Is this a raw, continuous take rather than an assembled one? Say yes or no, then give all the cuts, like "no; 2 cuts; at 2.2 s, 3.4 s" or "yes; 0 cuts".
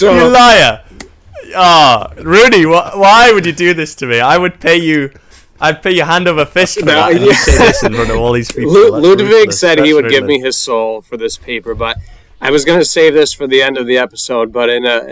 yes; 0 cuts